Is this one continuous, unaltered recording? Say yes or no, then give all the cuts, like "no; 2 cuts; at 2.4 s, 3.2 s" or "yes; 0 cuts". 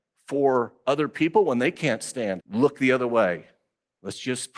no; 1 cut; at 2.4 s